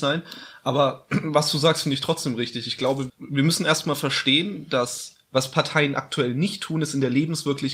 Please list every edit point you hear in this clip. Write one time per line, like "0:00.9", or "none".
0:03.1